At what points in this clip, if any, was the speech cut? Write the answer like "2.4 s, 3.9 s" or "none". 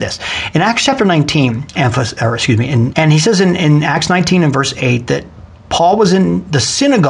1.7 s, 2.9 s